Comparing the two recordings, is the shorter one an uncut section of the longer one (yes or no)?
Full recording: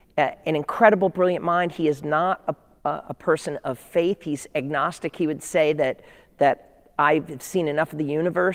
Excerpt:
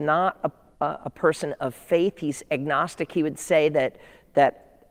yes